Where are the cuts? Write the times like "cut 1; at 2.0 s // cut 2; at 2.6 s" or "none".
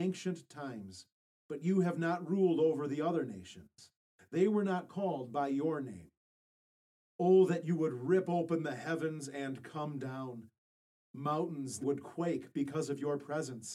cut 1; at 11.8 s